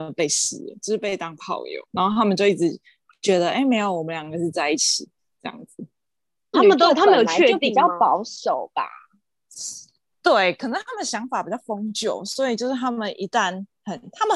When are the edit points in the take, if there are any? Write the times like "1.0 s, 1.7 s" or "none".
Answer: 6.5 s